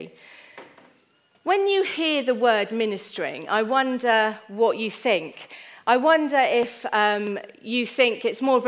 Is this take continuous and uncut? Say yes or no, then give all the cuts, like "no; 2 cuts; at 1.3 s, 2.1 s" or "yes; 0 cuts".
yes; 0 cuts